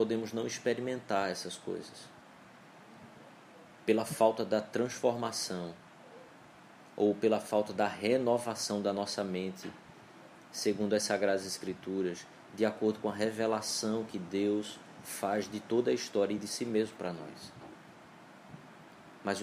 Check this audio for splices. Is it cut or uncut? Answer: uncut